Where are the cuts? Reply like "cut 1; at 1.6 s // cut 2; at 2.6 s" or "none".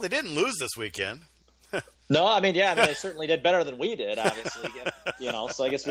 none

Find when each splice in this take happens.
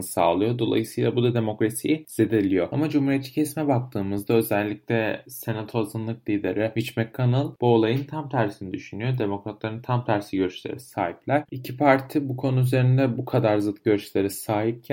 cut 1; at 11.5 s

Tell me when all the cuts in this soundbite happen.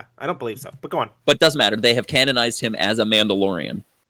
none

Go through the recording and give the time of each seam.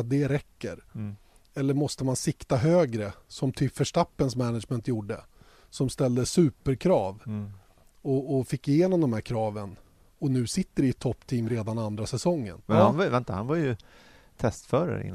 cut 1; at 12.6 s

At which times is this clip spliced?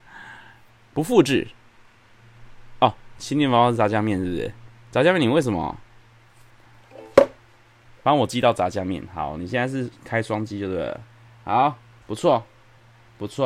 cut 1; at 12.0 s

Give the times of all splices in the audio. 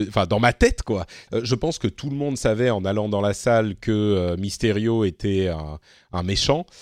cut 1; at 1.3 s

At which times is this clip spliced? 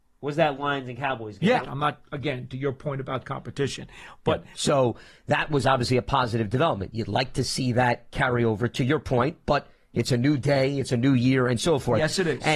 cut 1; at 1.6 s // cut 2; at 4.5 s

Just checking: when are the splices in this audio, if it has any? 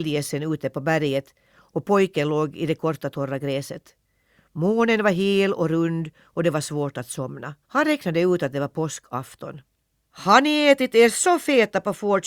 cut 1; at 7.6 s // cut 2; at 10.0 s

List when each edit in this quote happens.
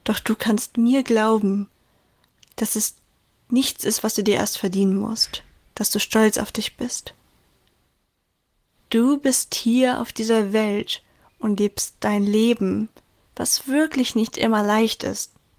none

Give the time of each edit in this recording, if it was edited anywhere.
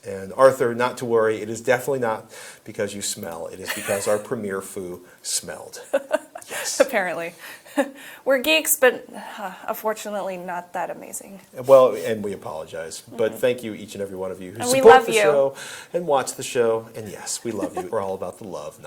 cut 1; at 17.9 s

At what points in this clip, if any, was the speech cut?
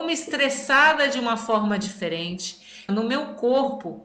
cut 1; at 2.9 s

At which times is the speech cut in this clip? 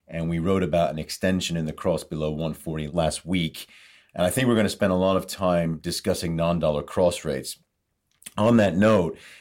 cut 1; at 4.0 s

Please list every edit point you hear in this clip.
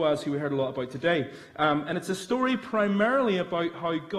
none

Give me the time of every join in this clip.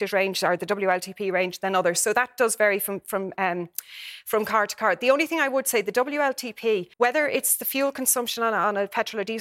cut 1; at 6.9 s

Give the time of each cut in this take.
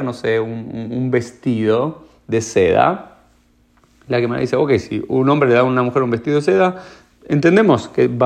none

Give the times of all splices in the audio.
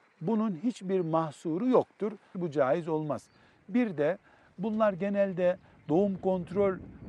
cut 1; at 2.3 s

